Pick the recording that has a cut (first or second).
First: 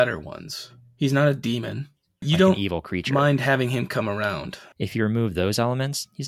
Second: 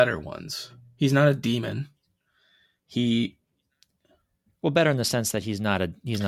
first